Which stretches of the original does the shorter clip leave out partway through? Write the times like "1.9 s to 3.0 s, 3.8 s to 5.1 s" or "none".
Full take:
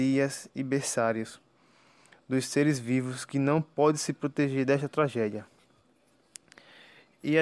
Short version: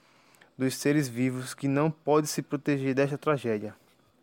none